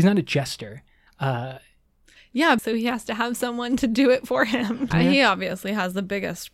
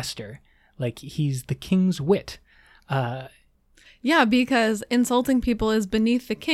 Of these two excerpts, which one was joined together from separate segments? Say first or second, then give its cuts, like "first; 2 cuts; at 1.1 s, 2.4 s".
first; 3 cuts; at 1.1 s, 2.6 s, 4.9 s